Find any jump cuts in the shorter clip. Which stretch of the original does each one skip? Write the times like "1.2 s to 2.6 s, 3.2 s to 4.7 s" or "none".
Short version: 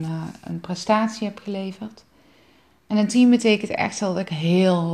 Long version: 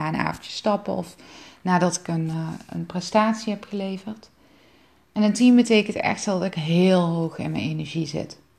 none